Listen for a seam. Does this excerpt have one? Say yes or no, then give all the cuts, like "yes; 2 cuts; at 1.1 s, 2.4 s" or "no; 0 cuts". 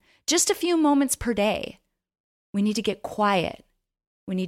no; 0 cuts